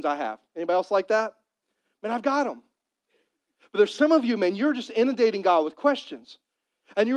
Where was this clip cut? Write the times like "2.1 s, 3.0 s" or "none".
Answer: none